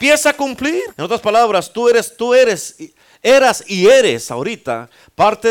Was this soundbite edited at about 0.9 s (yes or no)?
yes